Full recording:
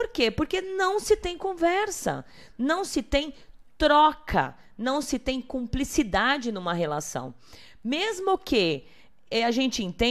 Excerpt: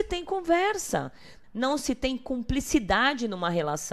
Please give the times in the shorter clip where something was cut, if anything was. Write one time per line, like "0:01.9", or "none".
0:01.4